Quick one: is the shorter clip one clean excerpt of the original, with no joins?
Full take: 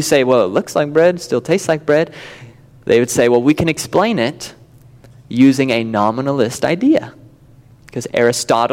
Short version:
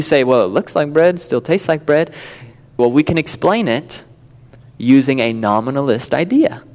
no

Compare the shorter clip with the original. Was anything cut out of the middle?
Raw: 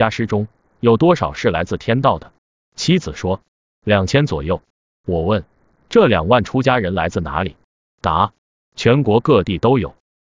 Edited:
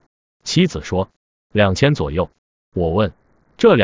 no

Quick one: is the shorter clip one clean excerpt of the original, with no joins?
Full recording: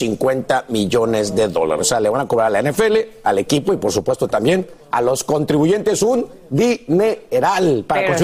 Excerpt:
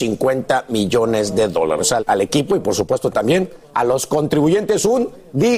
no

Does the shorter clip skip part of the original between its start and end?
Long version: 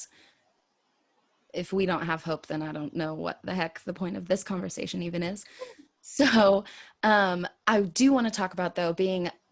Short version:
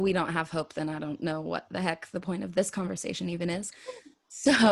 no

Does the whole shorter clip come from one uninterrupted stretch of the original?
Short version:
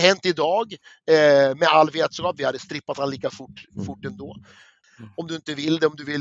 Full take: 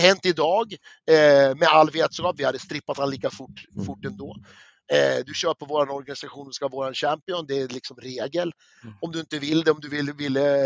no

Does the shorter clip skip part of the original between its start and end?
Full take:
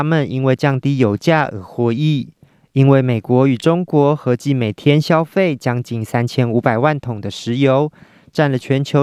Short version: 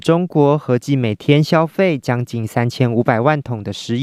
no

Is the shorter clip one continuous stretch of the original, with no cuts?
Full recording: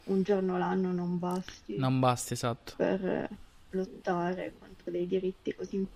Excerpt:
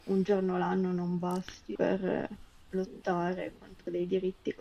no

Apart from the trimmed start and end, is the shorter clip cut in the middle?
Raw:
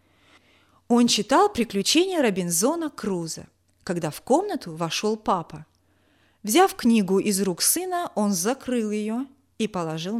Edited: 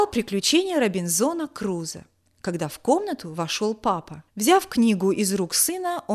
yes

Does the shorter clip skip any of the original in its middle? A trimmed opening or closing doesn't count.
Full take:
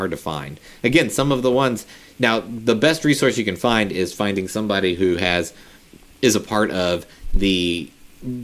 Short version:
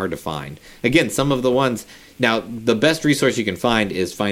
no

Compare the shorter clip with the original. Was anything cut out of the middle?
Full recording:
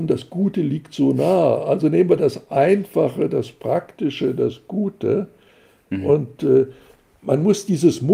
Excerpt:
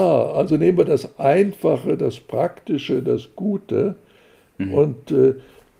no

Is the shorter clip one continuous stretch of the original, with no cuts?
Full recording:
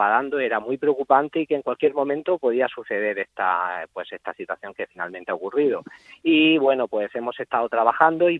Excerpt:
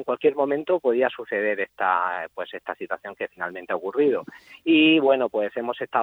yes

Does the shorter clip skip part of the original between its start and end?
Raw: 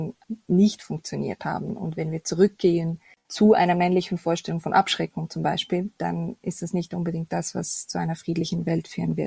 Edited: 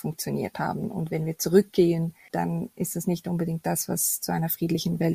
yes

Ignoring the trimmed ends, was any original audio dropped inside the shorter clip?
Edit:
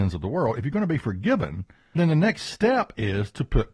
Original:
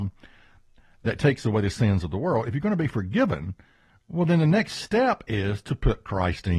yes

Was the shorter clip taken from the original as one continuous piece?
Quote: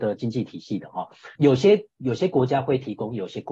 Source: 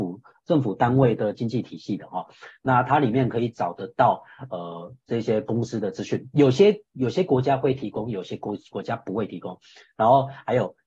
no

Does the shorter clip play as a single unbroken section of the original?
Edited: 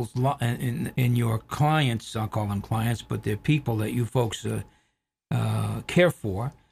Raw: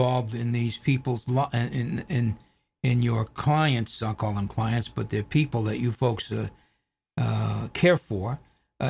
no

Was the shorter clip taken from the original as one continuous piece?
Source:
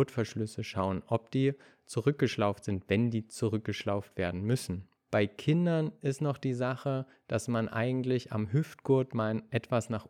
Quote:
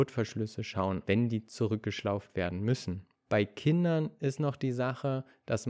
no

